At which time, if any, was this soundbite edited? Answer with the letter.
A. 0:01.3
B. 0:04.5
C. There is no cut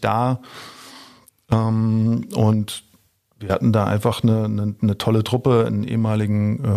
C